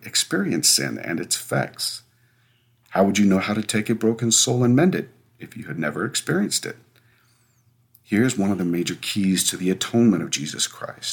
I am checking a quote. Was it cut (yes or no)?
no